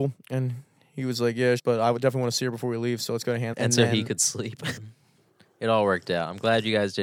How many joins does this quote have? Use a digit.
3